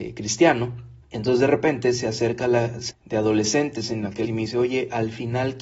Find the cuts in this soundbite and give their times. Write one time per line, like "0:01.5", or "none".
0:01.0
0:02.9
0:04.2